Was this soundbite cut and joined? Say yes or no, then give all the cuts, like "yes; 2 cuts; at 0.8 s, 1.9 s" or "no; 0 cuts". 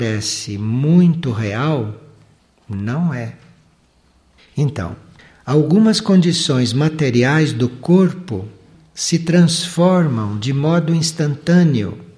yes; 1 cut; at 4.4 s